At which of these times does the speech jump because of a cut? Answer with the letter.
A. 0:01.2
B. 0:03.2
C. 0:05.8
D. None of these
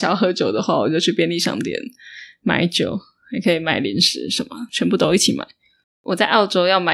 C